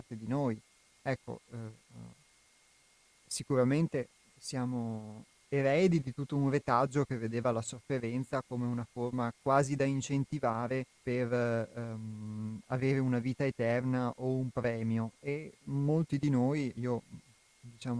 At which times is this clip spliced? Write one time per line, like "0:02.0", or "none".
0:10.9
0:16.7